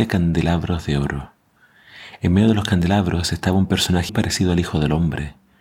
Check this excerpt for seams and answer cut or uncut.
cut